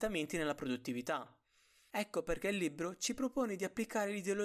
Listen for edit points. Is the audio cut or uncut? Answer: uncut